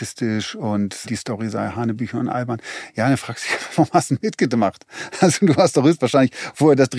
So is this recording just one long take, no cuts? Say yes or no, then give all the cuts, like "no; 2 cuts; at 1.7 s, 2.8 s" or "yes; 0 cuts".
no; 1 cut; at 1.0 s